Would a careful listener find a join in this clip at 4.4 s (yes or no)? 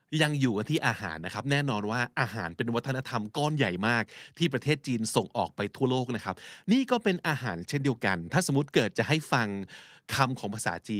no